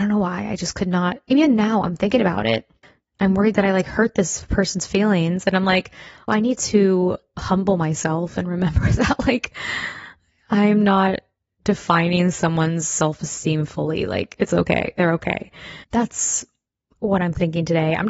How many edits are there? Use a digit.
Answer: 2